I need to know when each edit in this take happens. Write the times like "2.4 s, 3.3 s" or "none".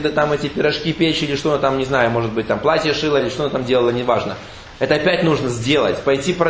3.2 s